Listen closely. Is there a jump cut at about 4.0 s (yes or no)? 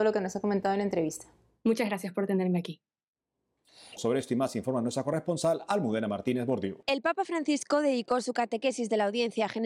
yes